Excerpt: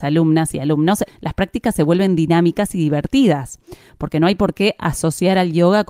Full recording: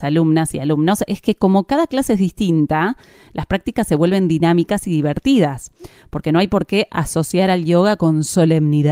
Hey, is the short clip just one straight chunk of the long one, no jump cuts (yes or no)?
no